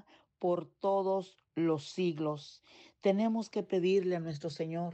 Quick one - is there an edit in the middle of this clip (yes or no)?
no